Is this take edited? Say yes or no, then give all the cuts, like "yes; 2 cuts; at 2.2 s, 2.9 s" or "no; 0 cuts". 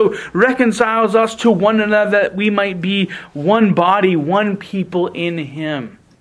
no; 0 cuts